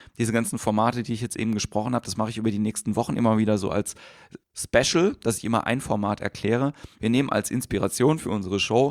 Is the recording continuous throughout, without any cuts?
no; 2 cuts; at 4.4 s, 7.0 s

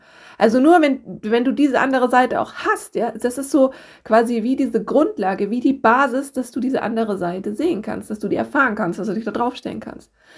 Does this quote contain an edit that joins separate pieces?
no; 0 cuts

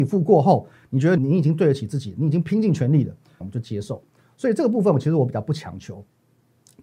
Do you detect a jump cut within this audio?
yes; 2 cuts; at 1.2 s, 3.4 s

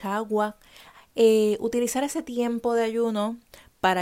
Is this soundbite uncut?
yes; 0 cuts

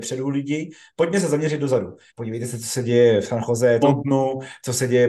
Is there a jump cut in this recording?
yes; 2 cuts; at 2.1 s, 3.8 s

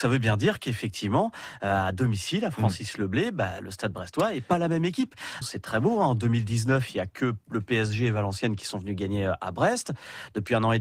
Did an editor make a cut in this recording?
yes; 1 cut; at 5.4 s

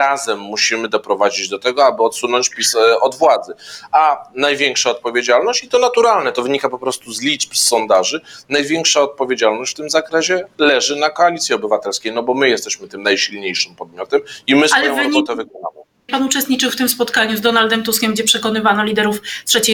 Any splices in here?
yes; 1 cut; at 16.1 s

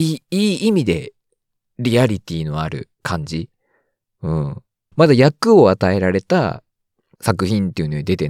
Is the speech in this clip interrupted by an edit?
yes; 1 cut; at 4.9 s

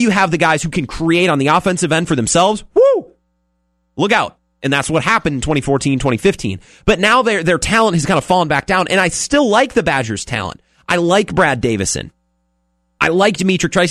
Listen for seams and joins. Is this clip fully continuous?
yes; 0 cuts

